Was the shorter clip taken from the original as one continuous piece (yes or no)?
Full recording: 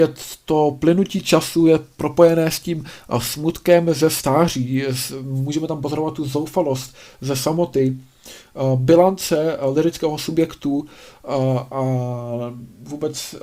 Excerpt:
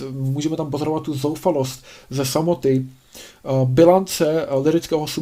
yes